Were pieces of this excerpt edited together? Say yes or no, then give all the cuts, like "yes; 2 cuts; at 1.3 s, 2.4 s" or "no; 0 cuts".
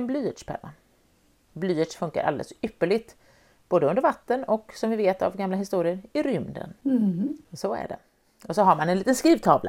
no; 0 cuts